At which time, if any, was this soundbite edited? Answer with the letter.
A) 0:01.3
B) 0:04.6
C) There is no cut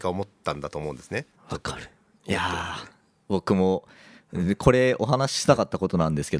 A